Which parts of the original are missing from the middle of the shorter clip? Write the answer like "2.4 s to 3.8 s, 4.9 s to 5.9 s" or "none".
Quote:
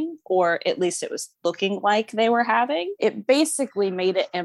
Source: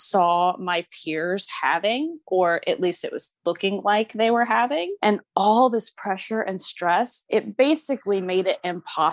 5.0 s to 7.3 s

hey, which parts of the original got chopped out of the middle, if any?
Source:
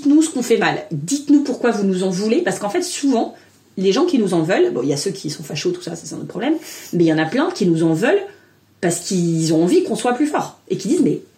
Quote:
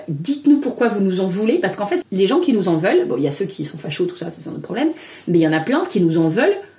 2.8 s to 3.7 s

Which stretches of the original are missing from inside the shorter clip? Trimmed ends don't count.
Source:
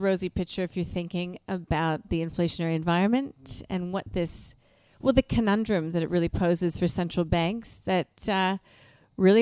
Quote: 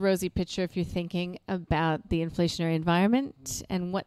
none

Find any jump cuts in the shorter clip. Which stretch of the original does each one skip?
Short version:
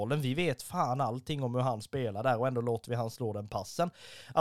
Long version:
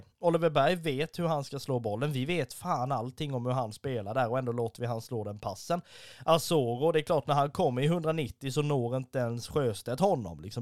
none

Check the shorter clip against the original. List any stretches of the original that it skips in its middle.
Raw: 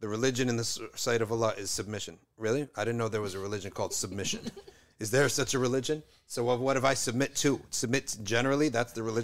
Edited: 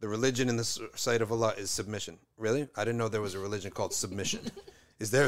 none

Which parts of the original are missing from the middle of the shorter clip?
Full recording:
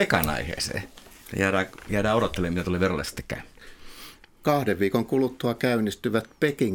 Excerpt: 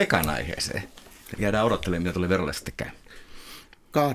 1.3 s to 1.9 s

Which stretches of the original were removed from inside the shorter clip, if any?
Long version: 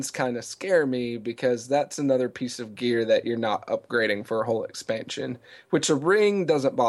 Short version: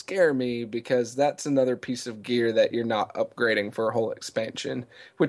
none

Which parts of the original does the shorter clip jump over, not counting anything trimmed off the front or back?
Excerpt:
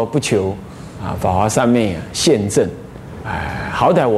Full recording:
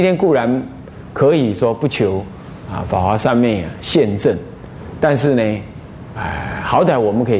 4.9 s to 6.1 s

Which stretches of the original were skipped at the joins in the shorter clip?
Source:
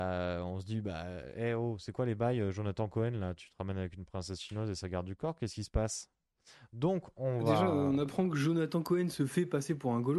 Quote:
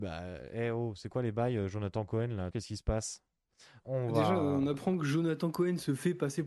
3.3 s to 5.4 s, 6.7 s to 7.1 s

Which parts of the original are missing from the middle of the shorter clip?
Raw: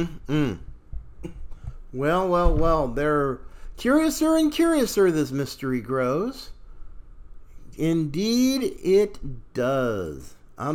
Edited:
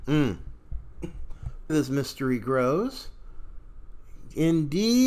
1.9 s to 5.1 s

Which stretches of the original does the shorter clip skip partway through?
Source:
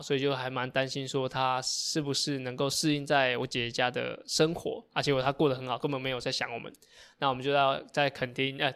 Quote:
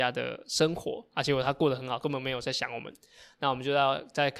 none

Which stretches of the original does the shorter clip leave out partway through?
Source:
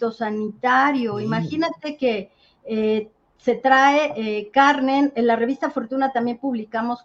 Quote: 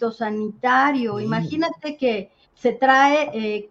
2.4 s to 3.3 s

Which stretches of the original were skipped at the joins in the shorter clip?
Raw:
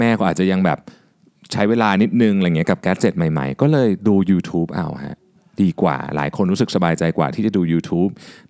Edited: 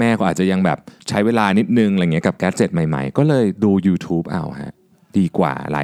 1.0 s to 1.4 s

